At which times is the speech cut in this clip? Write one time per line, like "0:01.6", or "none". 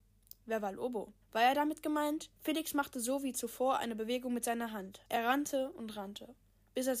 0:01.2
0:02.4
0:05.0